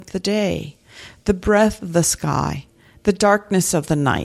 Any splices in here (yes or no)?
no